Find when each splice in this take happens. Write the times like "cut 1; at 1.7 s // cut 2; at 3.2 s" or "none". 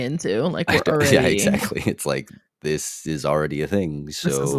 none